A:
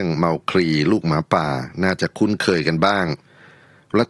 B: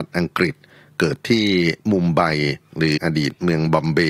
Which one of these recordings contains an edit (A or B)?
B